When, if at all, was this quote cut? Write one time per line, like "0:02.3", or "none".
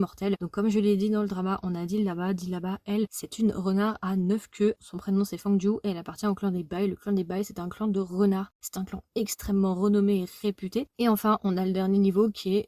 0:10.9